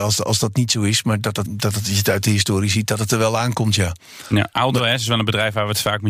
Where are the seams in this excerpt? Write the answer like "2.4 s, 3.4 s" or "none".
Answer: 1.5 s